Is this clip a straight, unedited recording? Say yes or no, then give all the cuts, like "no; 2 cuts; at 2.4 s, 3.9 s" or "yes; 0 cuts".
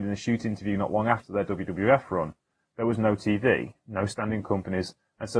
yes; 0 cuts